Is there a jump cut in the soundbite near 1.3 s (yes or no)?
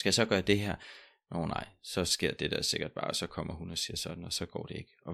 no